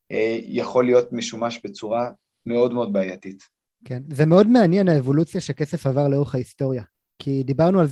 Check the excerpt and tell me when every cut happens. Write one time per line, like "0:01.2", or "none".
none